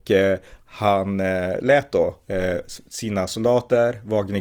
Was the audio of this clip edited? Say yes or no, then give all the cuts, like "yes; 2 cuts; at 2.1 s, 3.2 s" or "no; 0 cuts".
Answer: no; 0 cuts